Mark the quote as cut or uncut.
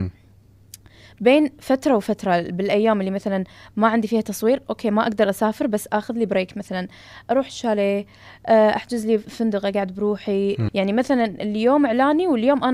cut